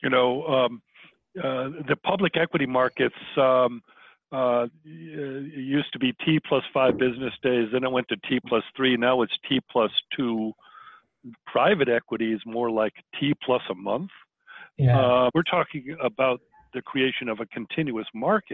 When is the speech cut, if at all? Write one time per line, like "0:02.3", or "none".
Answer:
0:11.3
0:15.3